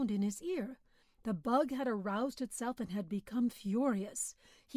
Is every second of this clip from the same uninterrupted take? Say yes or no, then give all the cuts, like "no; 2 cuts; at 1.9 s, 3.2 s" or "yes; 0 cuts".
no; 1 cut; at 1.0 s